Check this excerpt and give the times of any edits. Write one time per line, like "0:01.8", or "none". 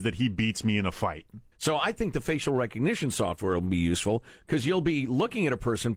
0:01.5